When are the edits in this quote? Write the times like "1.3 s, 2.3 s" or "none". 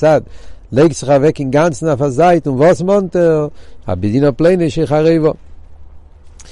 3.8 s

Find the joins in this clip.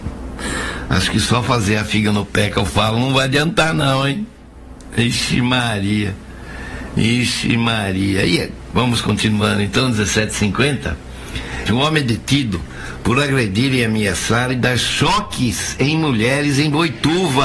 11.7 s

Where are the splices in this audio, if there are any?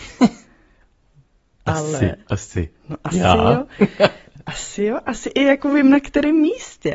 none

